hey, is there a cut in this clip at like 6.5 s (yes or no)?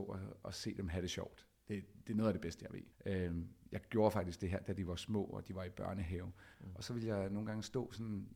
yes